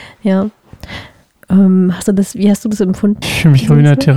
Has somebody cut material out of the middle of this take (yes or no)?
yes